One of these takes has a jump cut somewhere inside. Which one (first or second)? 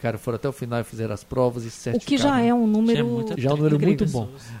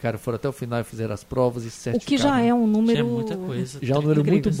first